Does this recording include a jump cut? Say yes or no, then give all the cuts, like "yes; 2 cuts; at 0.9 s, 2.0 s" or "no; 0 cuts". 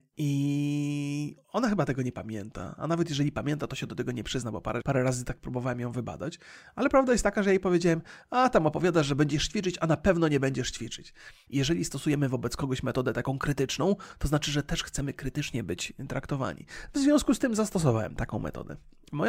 yes; 3 cuts; at 1.4 s, 4.8 s, 11.5 s